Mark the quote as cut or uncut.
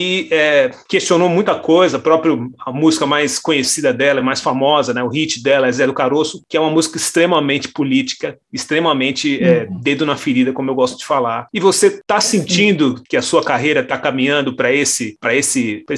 uncut